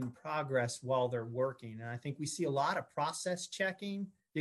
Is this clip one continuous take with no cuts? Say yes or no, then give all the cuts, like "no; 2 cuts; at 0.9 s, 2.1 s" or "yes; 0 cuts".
yes; 0 cuts